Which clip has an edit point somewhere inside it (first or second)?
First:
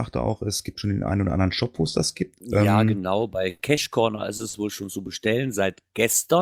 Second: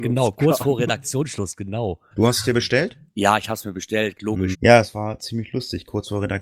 second